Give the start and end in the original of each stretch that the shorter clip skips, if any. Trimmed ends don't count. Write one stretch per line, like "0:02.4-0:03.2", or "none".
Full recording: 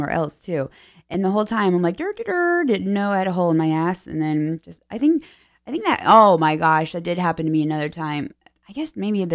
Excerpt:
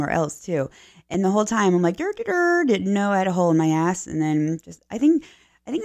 none

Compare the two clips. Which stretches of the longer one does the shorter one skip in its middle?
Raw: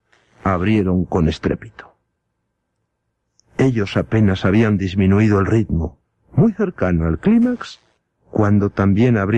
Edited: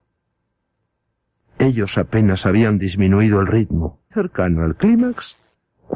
0:06.1-0:06.5

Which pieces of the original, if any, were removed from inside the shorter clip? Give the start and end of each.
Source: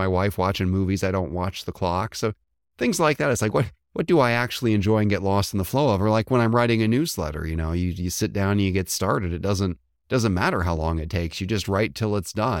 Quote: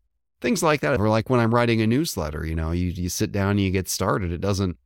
0:03.3-0:06.0

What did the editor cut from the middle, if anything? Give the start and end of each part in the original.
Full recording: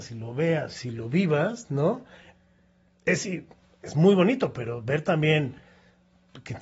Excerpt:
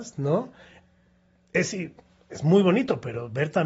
none

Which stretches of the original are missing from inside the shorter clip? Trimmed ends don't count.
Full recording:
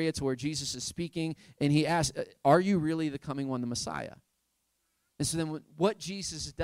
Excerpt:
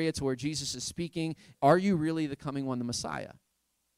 0:01.5-0:02.4

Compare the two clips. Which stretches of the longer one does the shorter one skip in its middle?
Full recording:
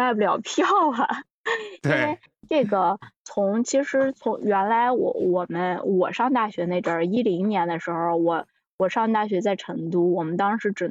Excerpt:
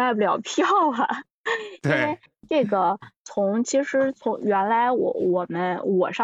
none

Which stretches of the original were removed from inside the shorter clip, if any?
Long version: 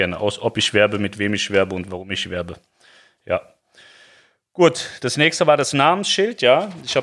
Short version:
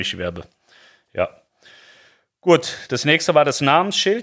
none

